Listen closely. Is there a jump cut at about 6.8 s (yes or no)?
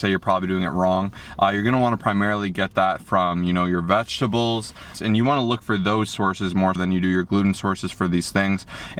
yes